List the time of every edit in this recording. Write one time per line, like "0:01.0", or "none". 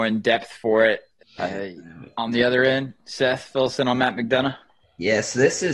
0:01.2